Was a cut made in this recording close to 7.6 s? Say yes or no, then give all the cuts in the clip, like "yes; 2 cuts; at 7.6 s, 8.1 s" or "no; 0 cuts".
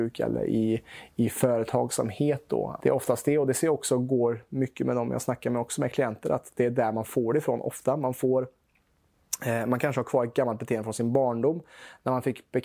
no; 1 cut; at 2.8 s